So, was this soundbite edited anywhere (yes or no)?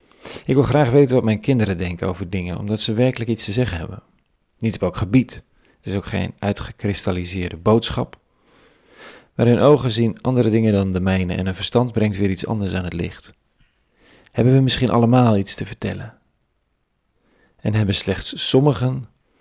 no